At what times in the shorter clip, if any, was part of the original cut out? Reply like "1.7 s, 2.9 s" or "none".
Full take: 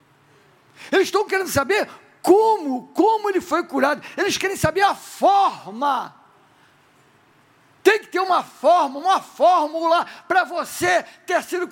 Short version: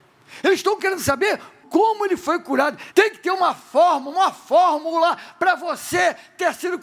1.6 s, 2.9 s